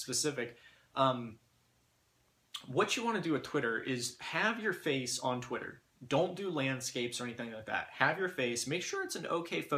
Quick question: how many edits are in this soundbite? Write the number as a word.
zero